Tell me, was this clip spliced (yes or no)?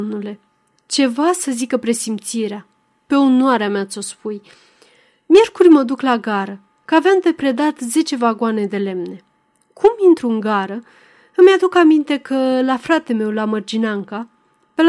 no